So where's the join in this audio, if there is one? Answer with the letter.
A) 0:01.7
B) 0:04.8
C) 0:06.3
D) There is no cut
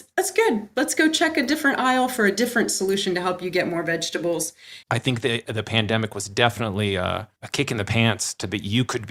B